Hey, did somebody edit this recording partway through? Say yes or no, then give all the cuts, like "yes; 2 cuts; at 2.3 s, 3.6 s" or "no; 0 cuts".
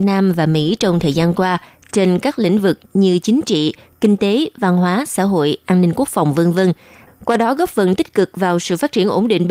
yes; 1 cut; at 7.1 s